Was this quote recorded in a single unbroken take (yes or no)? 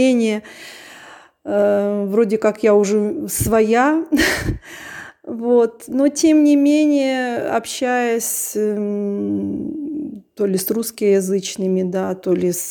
yes